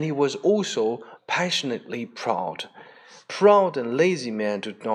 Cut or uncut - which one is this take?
cut